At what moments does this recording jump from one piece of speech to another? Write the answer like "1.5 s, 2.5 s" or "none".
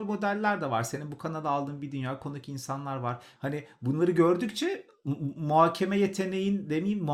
3.4 s